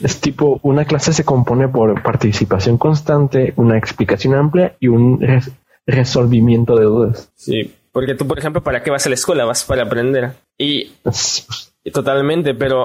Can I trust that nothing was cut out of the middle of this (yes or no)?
yes